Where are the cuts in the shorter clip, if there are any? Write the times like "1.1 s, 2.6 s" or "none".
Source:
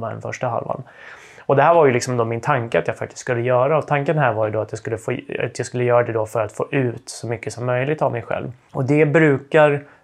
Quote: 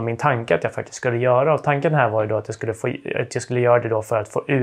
none

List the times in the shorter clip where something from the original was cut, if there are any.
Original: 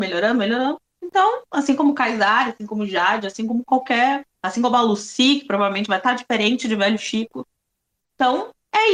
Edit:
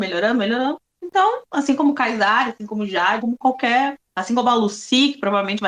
3.2 s

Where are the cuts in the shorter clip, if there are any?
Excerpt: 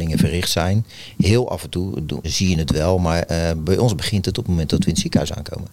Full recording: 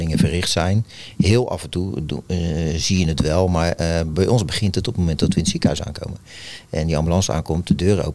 2.2 s

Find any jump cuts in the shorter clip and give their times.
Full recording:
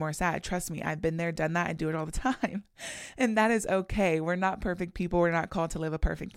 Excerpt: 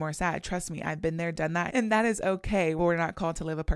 1.7 s, 2.8 s

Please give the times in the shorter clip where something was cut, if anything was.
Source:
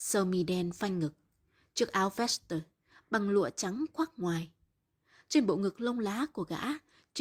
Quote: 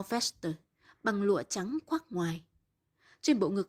none

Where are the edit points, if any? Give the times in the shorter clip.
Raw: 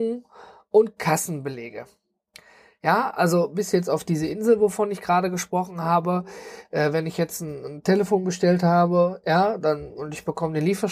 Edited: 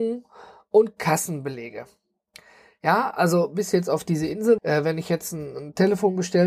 4.6 s

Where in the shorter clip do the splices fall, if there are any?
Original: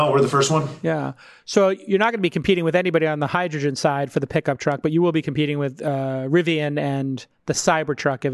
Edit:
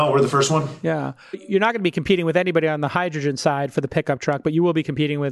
1.3 s

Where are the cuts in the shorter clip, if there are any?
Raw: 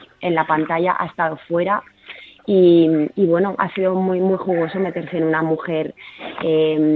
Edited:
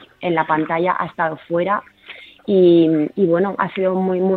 none

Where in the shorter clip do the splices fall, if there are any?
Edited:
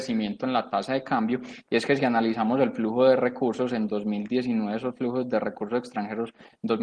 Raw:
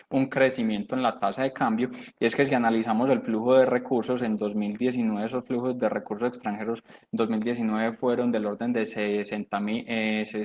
none

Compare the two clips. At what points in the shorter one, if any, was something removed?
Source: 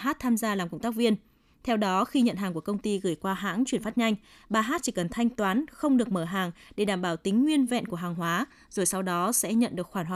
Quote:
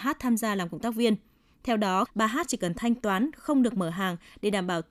2.0 s

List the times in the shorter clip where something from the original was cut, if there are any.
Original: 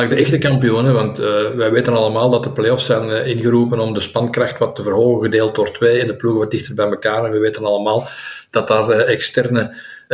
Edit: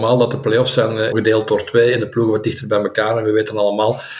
1.1 s

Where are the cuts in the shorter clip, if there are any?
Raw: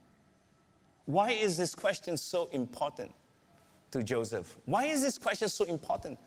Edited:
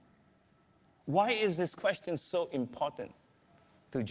none

